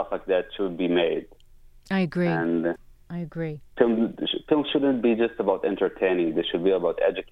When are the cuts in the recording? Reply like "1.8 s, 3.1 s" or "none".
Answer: none

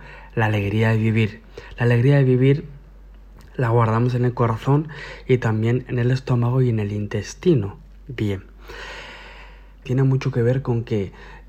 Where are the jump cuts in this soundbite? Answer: 9.9 s

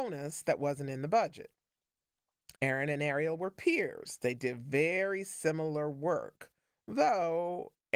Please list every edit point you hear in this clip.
2.6 s

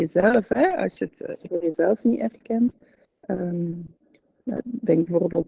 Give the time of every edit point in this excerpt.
none

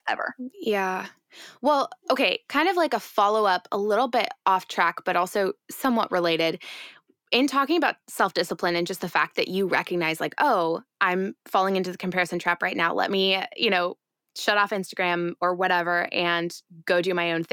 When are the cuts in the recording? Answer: none

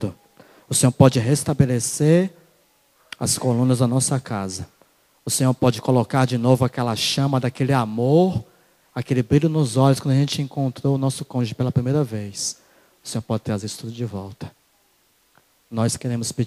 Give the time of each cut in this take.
none

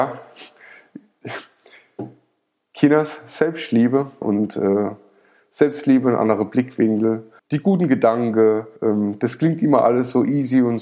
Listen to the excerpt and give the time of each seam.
4.2 s, 7.4 s, 8.8 s

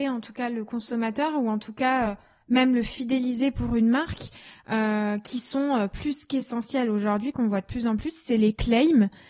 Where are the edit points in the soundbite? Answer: none

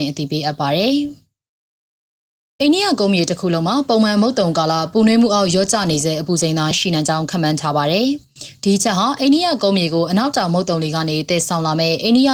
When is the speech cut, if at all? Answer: 6.7 s

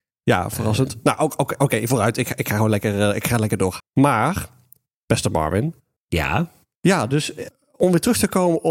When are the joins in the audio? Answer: 3.8 s, 6.7 s

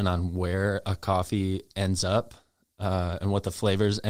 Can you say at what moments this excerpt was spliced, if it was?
none

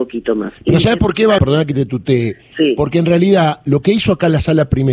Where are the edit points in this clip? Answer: 1.4 s

